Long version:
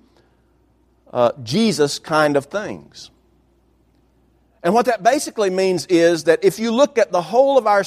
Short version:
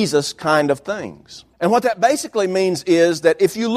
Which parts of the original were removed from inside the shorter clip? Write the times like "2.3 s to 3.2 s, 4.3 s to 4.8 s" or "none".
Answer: 3.2 s to 4.6 s